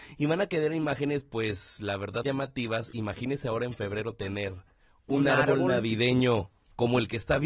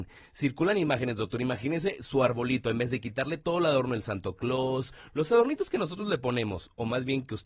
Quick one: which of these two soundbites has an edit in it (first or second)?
first